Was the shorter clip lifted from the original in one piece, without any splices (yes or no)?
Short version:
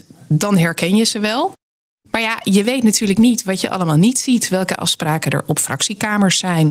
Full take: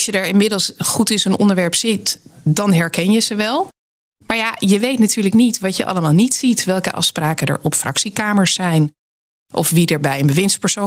yes